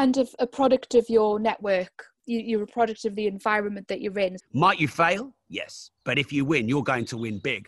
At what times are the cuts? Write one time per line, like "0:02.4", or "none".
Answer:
0:04.4
0:06.0

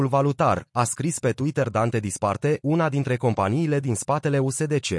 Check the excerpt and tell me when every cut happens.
0:02.6

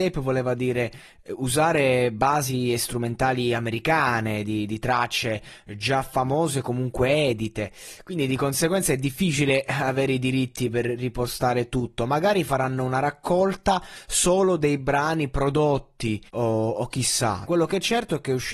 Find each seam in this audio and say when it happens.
0:16.3
0:17.4

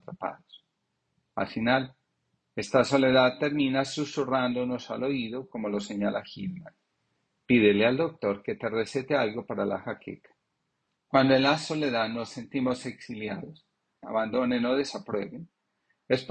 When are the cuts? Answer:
0:11.0
0:14.0

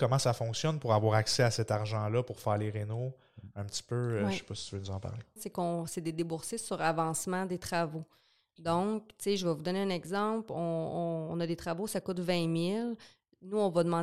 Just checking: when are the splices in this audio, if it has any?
0:05.4

